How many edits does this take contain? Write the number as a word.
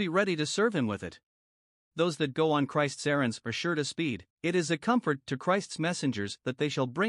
two